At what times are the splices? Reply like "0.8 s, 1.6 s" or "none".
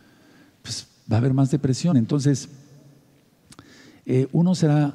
none